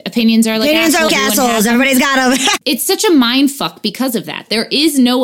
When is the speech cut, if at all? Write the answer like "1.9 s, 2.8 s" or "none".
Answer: 1.1 s